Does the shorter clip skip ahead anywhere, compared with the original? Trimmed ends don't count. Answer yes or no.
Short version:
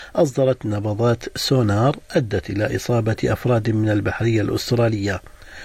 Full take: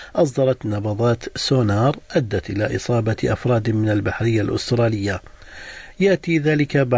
no